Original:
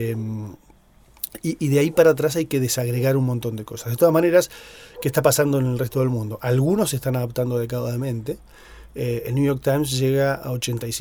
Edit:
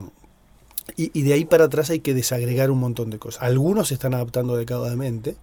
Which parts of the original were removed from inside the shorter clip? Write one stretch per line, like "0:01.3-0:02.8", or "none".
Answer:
0:03.8-0:06.4